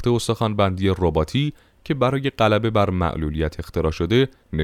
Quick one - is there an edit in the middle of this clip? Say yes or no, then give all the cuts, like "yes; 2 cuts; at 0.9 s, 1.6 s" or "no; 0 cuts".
no; 0 cuts